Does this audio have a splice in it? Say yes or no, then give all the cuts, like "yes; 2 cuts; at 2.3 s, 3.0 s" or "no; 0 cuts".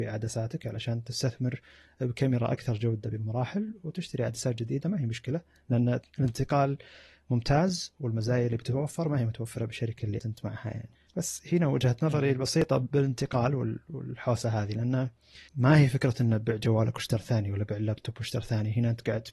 yes; 2 cuts; at 10.2 s, 15.5 s